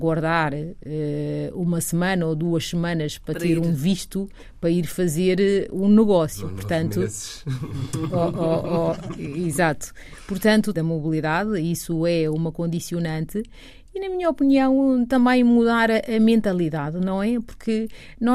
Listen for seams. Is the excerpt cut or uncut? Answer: cut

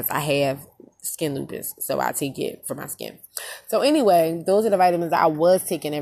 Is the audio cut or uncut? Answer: uncut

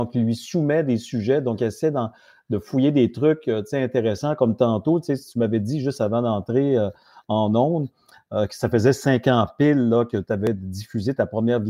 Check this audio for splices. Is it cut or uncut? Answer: uncut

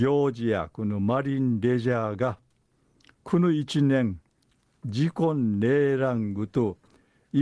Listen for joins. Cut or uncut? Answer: uncut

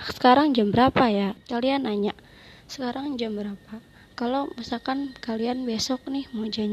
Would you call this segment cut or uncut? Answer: cut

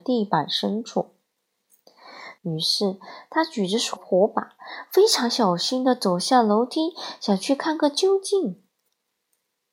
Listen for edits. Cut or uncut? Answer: cut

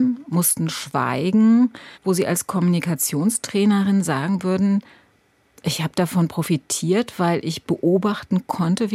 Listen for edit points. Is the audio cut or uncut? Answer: cut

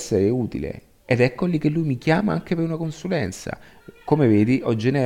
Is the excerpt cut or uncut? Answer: uncut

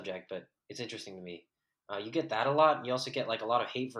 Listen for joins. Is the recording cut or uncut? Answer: uncut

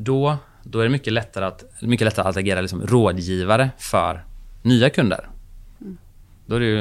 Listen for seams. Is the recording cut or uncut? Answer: cut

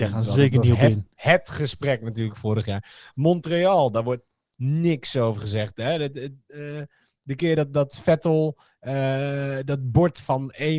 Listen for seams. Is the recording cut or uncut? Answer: uncut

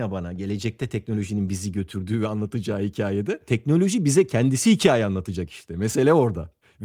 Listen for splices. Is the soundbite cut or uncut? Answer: uncut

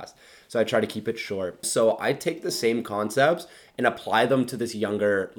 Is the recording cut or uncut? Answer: cut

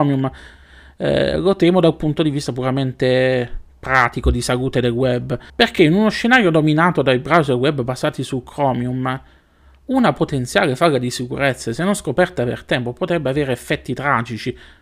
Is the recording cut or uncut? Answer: cut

